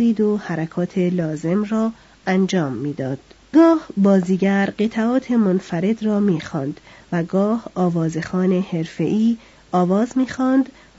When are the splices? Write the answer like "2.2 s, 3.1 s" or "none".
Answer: 3.5 s